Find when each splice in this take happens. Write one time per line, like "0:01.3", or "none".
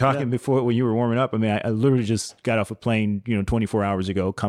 none